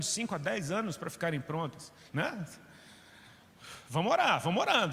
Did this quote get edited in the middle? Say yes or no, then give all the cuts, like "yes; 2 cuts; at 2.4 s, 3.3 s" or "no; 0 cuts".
yes; 1 cut; at 2.1 s